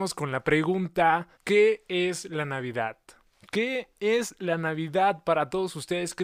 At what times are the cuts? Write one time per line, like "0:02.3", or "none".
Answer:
0:01.3